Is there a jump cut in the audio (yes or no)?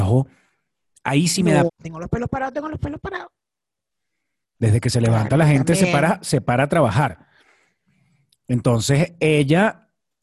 yes